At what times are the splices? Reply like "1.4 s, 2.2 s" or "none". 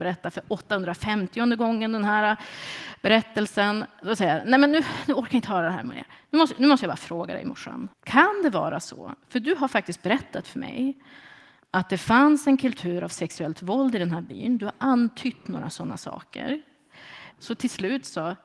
7.9 s, 17.3 s